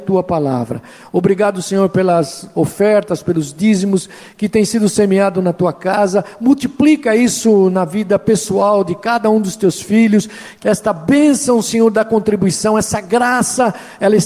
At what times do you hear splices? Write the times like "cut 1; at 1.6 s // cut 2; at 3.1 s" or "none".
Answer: cut 1; at 10.6 s